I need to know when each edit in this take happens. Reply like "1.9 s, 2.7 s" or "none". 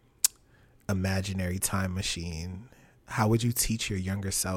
none